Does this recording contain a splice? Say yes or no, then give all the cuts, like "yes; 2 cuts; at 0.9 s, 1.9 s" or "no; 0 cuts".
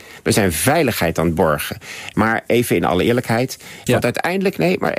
yes; 2 cuts; at 2.1 s, 3.9 s